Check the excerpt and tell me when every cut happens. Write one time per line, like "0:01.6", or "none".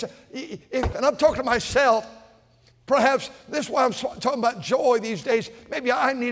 0:00.9